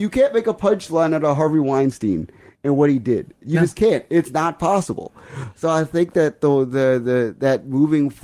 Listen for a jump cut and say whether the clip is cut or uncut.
uncut